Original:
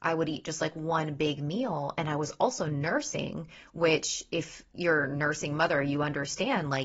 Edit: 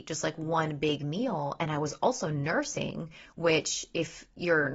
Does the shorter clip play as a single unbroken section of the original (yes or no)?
yes